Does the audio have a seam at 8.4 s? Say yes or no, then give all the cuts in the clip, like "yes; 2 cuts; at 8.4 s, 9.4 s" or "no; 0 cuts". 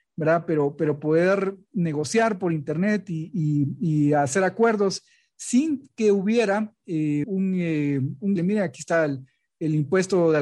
yes; 2 cuts; at 7.2 s, 8.4 s